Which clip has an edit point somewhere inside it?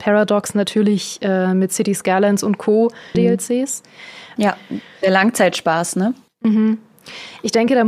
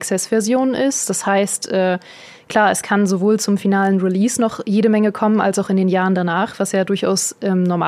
first; 3 cuts; at 3.1 s, 4.4 s, 6.3 s

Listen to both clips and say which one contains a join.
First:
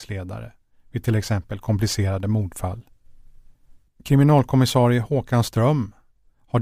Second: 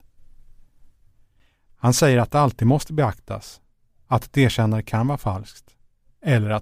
first; 1 cut; at 3.9 s

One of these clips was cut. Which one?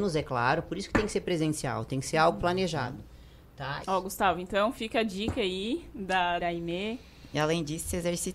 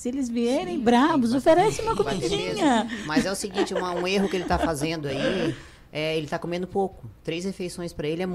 first; 2 cuts; at 3.8 s, 6.4 s

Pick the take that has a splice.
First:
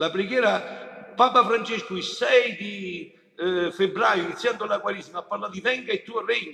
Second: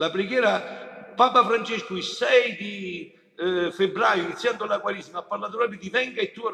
first; 1 cut; at 5.5 s

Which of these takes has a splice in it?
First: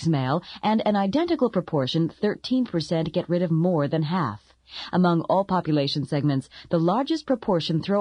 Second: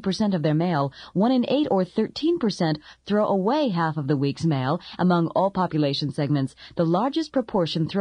second; 1 cut; at 5.0 s

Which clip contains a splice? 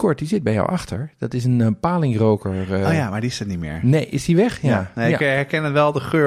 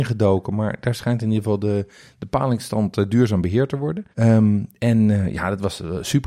second; 1 cut; at 4.1 s

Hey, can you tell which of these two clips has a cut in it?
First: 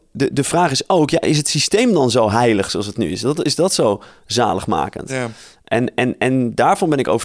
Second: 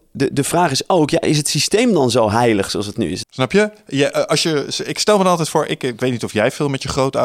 second; 1 cut; at 3.2 s

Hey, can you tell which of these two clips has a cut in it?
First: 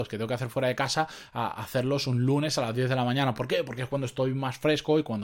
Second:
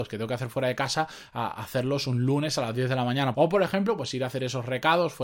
second; 1 cut; at 3.3 s

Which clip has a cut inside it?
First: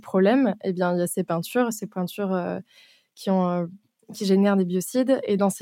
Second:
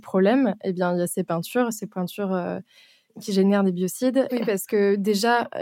second; 2 cuts; at 3.1 s, 4.3 s

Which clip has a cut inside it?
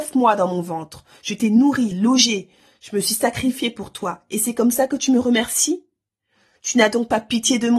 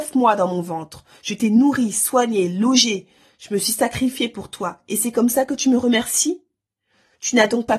first; 1 cut; at 1.9 s

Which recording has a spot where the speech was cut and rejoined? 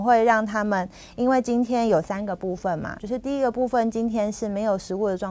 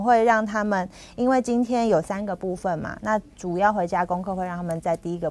first; 1 cut; at 3.0 s

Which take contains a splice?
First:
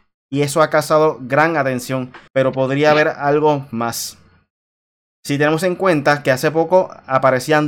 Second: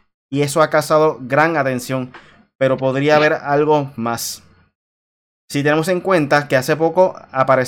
first; 1 cut; at 2.3 s

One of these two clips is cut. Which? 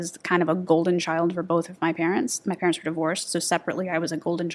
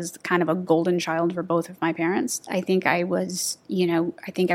second; 1 cut; at 2.4 s

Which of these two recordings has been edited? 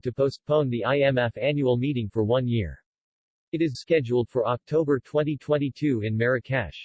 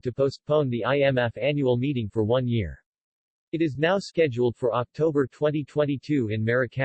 first; 1 cut; at 3.7 s

